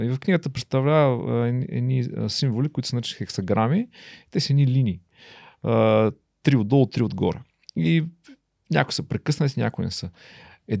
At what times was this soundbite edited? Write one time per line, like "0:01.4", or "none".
none

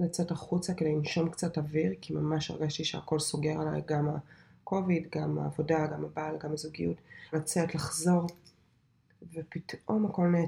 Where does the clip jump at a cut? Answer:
0:05.9
0:07.3

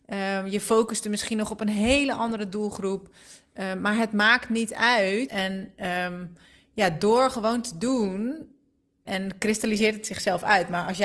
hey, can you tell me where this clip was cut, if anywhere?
0:05.3
0:09.1

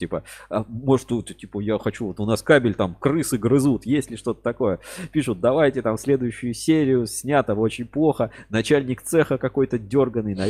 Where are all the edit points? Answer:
none

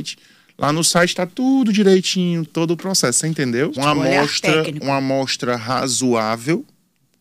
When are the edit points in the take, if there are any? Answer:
0:02.5
0:03.8

